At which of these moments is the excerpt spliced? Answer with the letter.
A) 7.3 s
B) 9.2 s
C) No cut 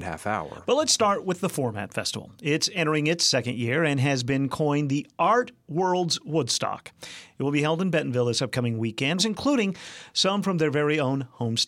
B